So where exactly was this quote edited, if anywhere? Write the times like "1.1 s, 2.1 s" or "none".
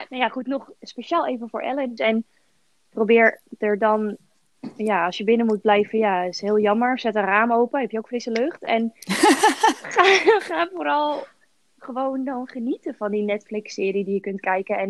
2.0 s